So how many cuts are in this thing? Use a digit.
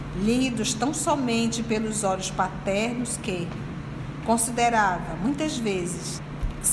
1